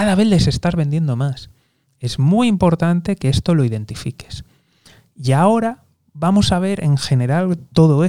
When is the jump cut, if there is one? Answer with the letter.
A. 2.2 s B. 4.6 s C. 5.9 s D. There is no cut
D